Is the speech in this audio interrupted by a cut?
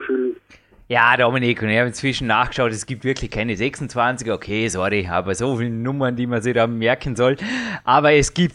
no; 0 cuts

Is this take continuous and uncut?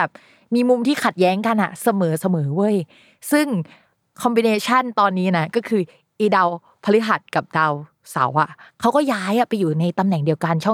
yes; 0 cuts

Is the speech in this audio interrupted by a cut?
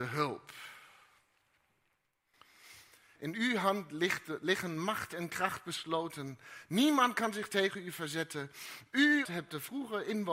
yes; 2 cuts; at 3.1 s, 9.2 s

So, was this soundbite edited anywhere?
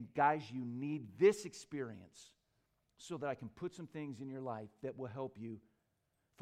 no; 0 cuts

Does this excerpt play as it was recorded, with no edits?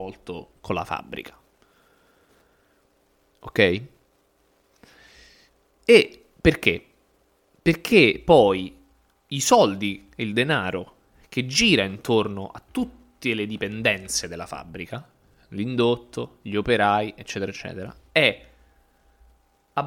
yes; 0 cuts

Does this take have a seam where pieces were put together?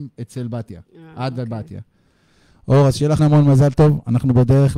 yes; 1 cut; at 3.2 s

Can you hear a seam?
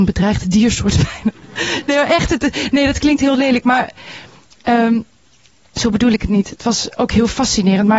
no; 0 cuts

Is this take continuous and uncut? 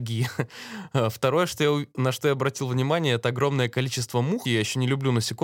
no; 1 cut; at 4.4 s

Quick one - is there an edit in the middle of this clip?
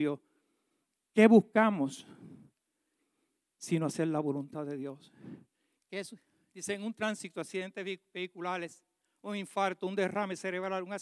yes; 1 cut; at 5.8 s

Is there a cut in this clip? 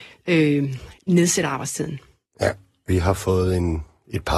no; 0 cuts

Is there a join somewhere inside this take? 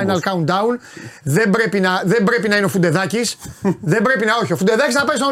no; 0 cuts

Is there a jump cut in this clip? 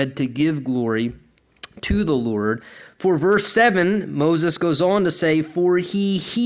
no; 0 cuts

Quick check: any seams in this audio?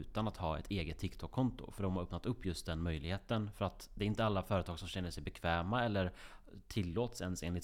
no; 0 cuts

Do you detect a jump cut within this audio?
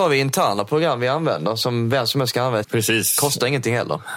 yes; 1 cut; at 2.6 s

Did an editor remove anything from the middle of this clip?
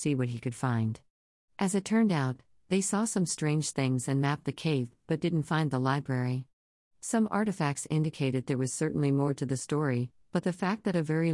no; 0 cuts

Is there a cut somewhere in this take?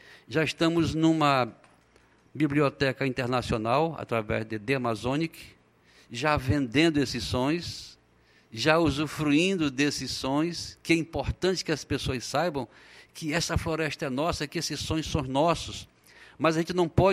no; 0 cuts

